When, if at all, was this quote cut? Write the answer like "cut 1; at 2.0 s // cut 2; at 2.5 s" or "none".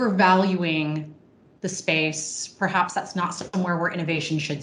none